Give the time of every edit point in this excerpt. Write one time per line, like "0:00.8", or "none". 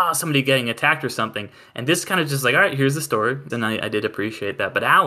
0:03.5